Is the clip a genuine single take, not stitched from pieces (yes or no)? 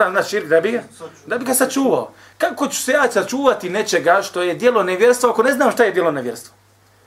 yes